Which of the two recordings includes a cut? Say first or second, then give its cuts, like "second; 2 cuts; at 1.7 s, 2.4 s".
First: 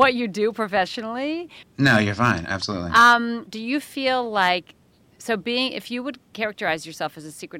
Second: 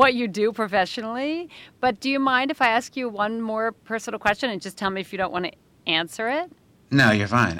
first; 1 cut; at 1.6 s